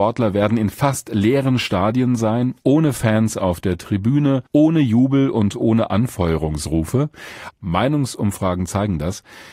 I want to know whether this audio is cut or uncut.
cut